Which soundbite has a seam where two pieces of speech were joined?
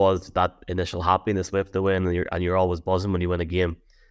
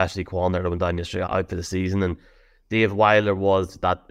second; 1 cut; at 1.3 s

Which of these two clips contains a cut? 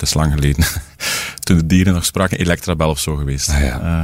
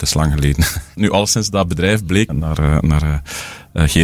second; 2 cuts; at 1.0 s, 2.3 s

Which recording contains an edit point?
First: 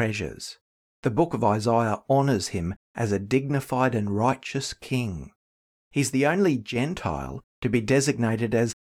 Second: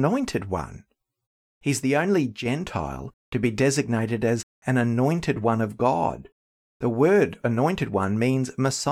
second; 1 cut; at 1.4 s

